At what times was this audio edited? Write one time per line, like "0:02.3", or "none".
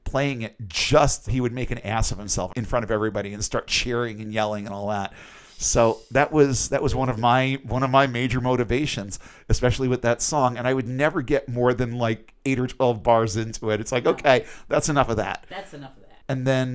0:01.3